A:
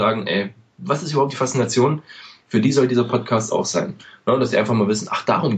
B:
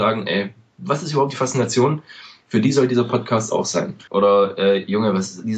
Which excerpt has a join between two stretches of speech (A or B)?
B